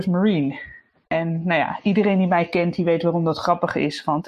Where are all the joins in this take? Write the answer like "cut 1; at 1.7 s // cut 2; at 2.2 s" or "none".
none